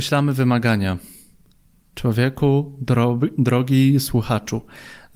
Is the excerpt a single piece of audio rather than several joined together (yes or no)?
yes